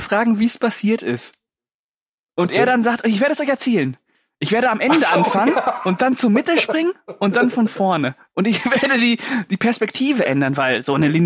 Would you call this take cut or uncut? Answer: uncut